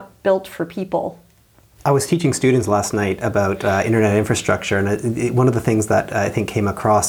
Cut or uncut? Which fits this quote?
uncut